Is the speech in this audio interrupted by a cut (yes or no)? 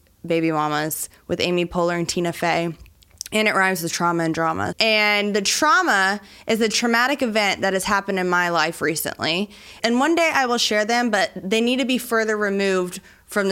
yes